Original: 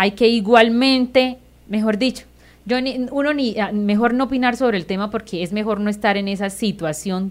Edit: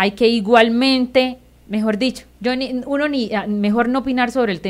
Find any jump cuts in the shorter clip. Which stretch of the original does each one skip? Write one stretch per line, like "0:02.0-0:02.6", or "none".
0:02.3-0:02.6